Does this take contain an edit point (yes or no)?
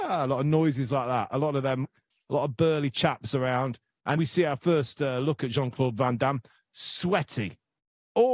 yes